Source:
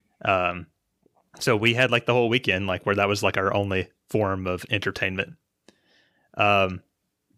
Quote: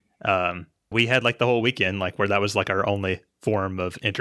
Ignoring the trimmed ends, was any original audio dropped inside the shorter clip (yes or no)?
yes